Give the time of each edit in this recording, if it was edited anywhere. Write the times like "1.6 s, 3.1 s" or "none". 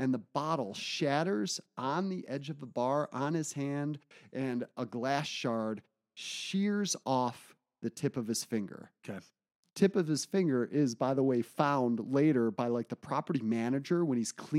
none